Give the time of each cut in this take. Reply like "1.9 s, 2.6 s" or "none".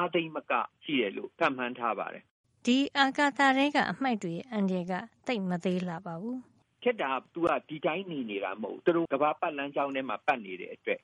9.1 s